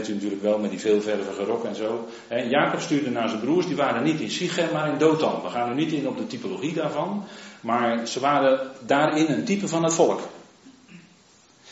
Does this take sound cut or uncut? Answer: uncut